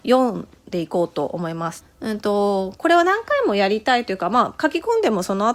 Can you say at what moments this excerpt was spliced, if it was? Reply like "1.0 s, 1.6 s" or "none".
1.8 s